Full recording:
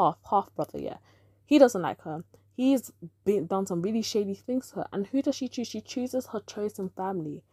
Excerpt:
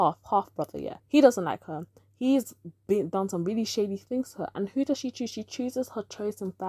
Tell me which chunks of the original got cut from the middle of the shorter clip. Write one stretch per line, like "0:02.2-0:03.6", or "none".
0:01.0-0:01.4